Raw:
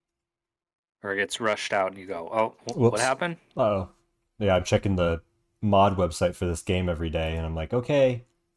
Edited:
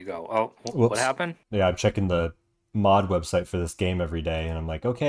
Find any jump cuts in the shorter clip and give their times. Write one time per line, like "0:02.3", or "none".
0:01.4